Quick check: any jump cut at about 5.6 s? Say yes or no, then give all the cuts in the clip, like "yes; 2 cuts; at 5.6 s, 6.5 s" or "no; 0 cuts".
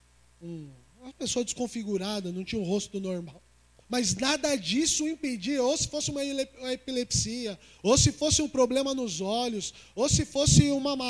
no; 2 cuts; at 3.8 s, 7.8 s